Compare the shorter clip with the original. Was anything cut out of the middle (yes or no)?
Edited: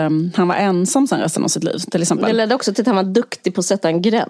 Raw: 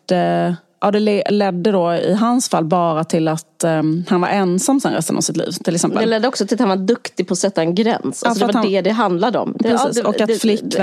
no